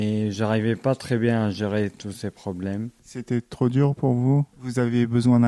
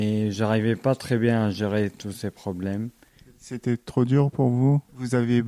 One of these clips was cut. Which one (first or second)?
first